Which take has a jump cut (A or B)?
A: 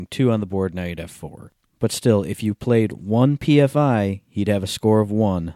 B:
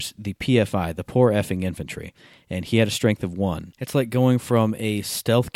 B